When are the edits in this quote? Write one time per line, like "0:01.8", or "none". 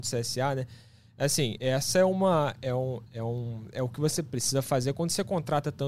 0:01.6
0:03.0